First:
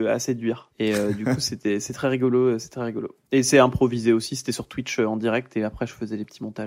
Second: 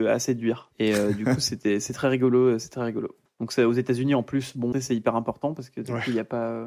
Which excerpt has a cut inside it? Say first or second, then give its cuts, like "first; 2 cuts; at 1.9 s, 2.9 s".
second; 2 cuts; at 3.3 s, 4.7 s